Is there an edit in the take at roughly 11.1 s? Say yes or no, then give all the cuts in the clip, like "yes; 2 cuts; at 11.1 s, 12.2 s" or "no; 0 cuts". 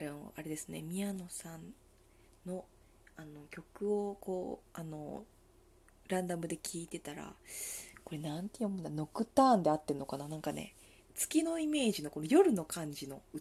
yes; 1 cut; at 11.1 s